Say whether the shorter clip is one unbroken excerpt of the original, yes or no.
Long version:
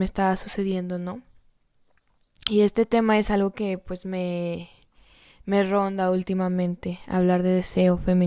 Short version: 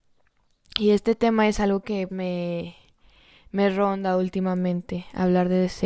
no